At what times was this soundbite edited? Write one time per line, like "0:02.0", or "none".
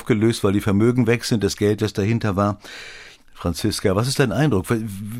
0:03.2